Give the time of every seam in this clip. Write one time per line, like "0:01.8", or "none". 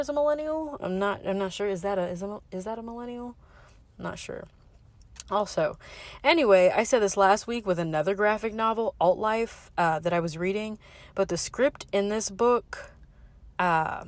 none